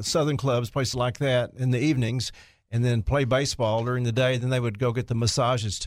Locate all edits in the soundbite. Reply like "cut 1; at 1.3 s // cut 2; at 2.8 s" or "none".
none